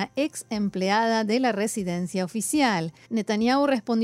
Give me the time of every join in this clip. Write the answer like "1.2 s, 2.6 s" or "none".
3.0 s